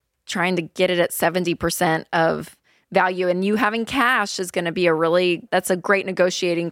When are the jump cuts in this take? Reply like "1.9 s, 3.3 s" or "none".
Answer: 5.5 s

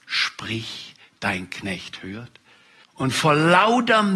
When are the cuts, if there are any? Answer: 2.8 s

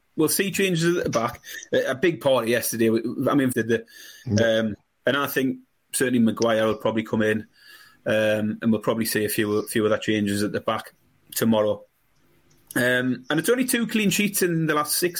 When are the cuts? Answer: 3.5 s

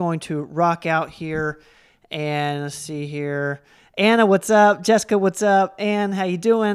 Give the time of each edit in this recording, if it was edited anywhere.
none

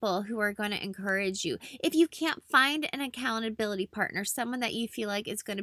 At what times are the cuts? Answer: none

